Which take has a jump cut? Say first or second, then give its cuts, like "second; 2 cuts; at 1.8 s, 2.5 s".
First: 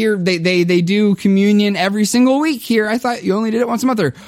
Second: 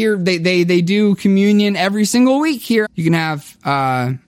second; 1 cut; at 2.8 s